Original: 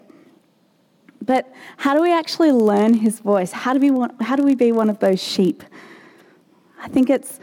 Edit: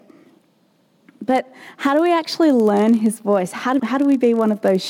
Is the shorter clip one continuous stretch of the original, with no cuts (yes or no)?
no